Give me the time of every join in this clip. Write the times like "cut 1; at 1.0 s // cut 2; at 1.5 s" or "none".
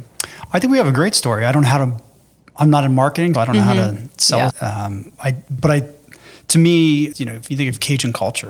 cut 1; at 3.3 s // cut 2; at 4.5 s // cut 3; at 7.1 s